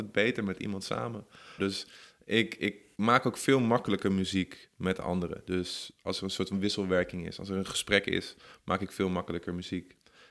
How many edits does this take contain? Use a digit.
1